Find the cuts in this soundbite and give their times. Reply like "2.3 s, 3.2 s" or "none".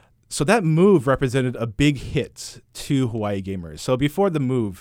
none